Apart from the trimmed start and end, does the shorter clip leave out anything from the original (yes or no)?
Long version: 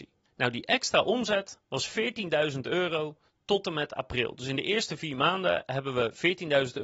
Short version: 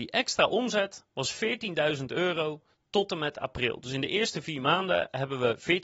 no